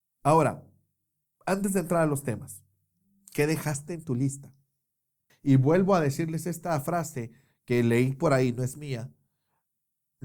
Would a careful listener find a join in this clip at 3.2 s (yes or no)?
no